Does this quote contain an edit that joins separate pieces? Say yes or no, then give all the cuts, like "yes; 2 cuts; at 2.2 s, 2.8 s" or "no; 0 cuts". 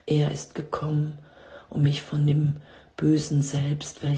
no; 0 cuts